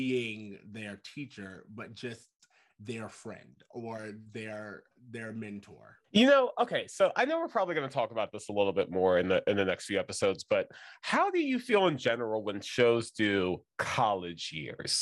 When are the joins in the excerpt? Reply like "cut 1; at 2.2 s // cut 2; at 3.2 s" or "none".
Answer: cut 1; at 6.0 s